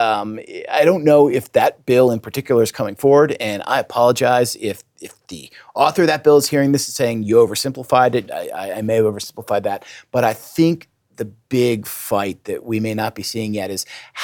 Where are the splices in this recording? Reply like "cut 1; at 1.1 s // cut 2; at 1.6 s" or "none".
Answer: cut 1; at 8.3 s